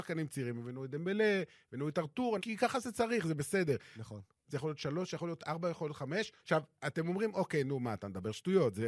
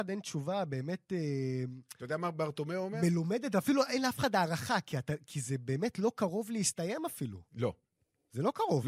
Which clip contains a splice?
first; 3 cuts; at 2.4 s, 4.4 s, 6.4 s

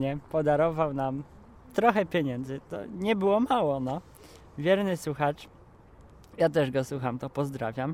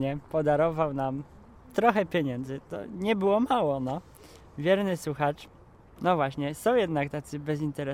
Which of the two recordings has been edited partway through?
second; 1 cut; at 6.0 s

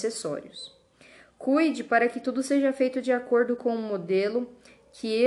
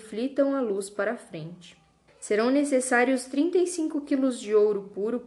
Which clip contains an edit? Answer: second; 1 cut; at 2.1 s

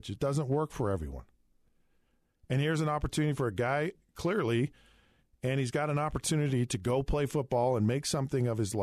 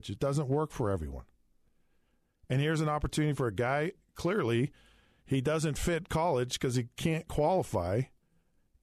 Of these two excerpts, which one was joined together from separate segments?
first; 1 cut; at 5.2 s

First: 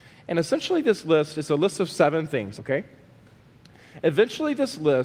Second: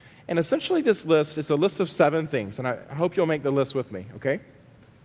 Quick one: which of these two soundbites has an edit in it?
first; 1 cut; at 2.6 s

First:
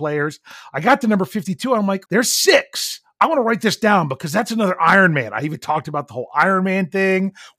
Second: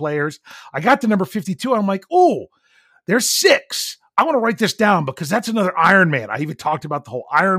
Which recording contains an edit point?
first; 1 cut; at 2.1 s

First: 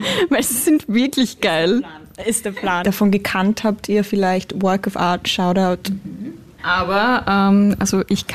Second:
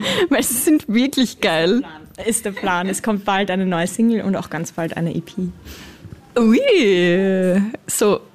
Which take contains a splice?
first; 2 cuts; at 2.8 s, 6.5 s

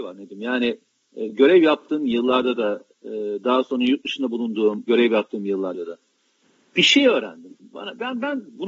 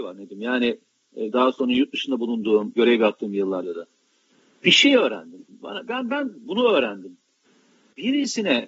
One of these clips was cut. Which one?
second; 1 cut; at 1.3 s

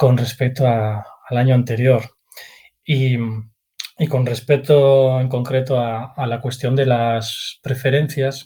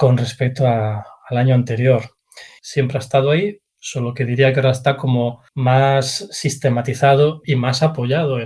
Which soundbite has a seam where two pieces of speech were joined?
second; 3 cuts; at 2.6 s, 5.5 s, 7.4 s

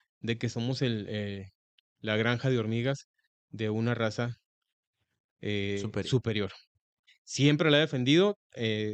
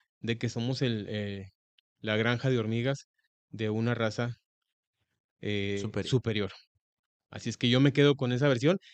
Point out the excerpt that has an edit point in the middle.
first; 1 cut; at 7.1 s

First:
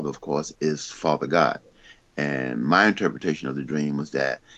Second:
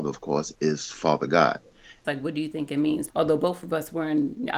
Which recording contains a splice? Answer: second; 2 cuts; at 2.0 s, 3.1 s

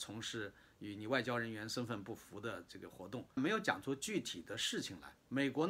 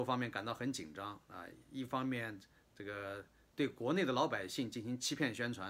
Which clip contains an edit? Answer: first; 1 cut; at 3.4 s

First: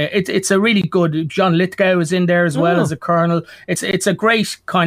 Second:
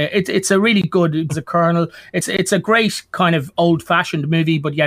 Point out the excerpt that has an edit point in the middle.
second; 1 cut; at 1.3 s

